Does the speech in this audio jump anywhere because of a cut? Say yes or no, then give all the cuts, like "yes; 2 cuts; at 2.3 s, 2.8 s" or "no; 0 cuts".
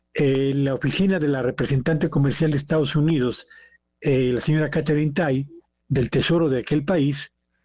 yes; 1 cut; at 5.8 s